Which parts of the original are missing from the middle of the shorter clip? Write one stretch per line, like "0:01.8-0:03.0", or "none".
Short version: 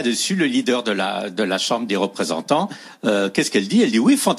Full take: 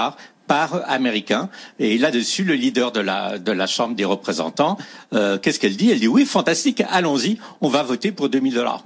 none